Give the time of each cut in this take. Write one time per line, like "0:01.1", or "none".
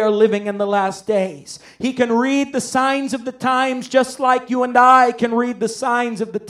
none